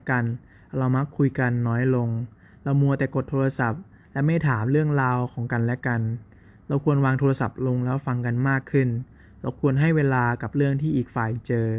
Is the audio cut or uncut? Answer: uncut